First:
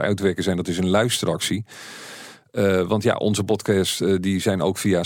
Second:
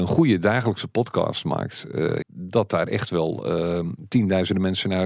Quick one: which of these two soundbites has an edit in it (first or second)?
second